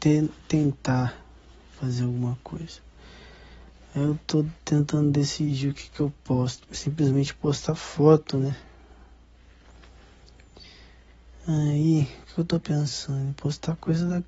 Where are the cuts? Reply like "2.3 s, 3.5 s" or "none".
6.7 s